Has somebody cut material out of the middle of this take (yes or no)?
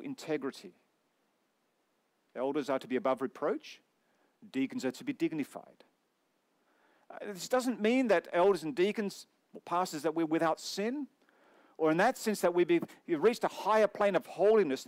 no